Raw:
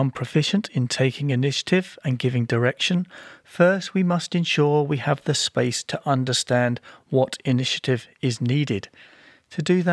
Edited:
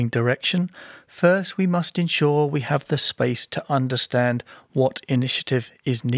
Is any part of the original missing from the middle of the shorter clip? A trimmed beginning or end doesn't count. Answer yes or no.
no